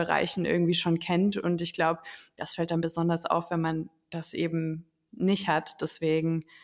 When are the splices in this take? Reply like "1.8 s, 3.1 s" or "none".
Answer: none